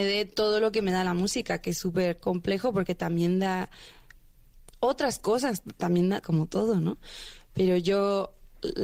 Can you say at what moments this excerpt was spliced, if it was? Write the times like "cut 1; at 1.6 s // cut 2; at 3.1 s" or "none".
cut 1; at 6.2 s